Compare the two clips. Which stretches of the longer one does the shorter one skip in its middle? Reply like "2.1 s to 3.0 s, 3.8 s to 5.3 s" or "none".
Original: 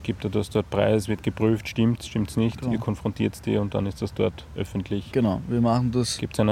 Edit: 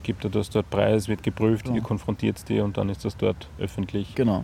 1.6 s to 2.6 s

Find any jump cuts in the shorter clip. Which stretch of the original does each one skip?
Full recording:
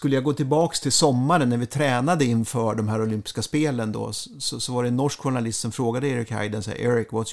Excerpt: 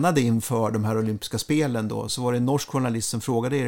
4.1 s to 4.6 s

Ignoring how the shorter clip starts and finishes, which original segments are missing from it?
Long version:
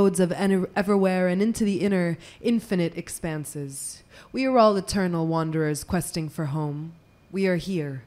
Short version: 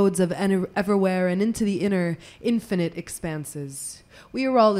none

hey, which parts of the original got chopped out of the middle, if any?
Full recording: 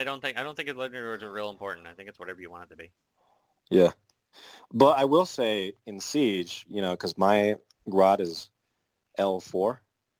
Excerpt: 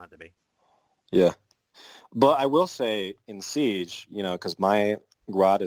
none

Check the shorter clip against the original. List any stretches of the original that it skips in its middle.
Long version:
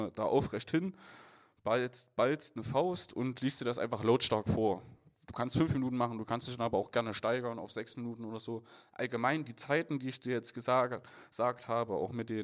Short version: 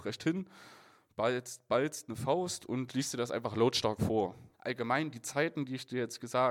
5.0 s to 8.9 s

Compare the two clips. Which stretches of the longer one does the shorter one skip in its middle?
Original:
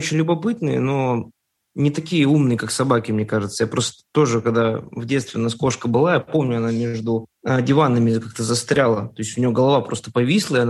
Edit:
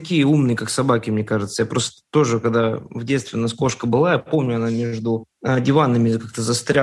none

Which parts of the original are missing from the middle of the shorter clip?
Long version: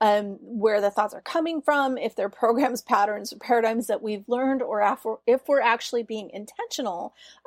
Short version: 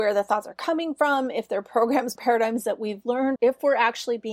2.8 s to 3.4 s, 4.6 s to 5.2 s

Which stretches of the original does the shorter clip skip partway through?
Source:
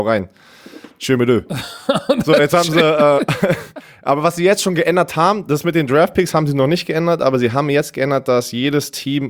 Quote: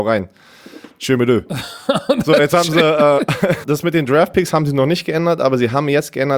3.6 s to 5.4 s

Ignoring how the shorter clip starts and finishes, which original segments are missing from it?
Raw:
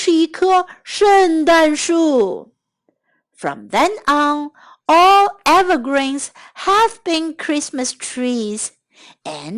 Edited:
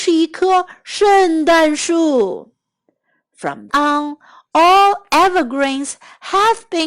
3.7 s to 4.0 s

